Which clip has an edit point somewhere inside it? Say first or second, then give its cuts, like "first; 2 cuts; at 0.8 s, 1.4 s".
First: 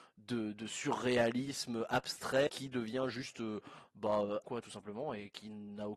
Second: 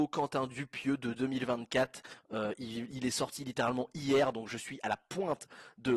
first; 2 cuts; at 2.5 s, 4.4 s